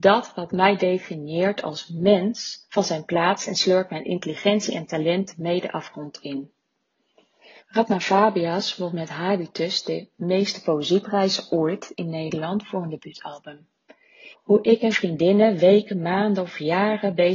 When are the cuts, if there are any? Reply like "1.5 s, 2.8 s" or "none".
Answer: 7.6 s, 14.3 s